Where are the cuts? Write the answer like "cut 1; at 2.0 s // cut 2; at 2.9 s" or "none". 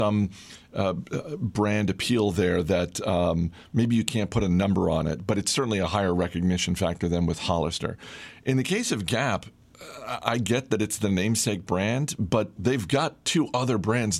cut 1; at 12.6 s